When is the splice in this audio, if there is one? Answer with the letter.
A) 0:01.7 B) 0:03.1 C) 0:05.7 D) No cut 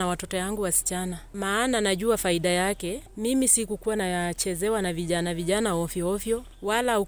D